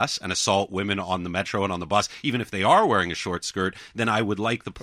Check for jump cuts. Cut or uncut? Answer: uncut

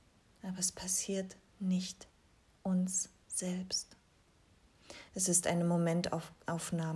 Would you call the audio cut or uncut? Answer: cut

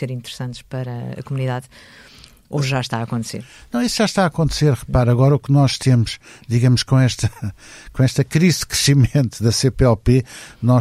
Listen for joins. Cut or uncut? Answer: uncut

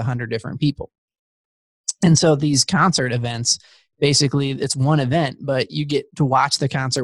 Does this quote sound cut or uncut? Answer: uncut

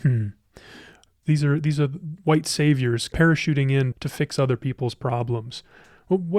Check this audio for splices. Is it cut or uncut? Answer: cut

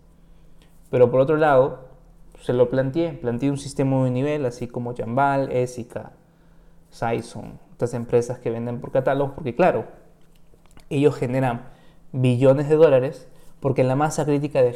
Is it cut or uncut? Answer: uncut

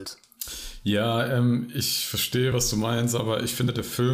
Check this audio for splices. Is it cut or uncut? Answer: uncut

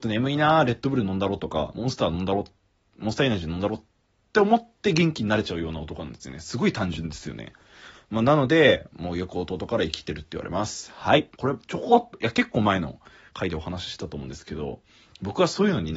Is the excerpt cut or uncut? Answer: cut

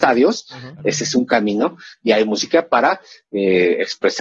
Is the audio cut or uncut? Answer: uncut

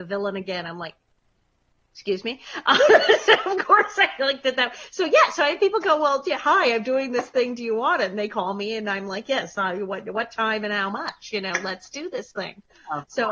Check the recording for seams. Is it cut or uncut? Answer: uncut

